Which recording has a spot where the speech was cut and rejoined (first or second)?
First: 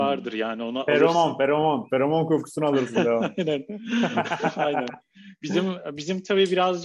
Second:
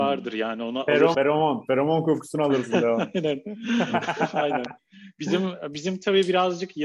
second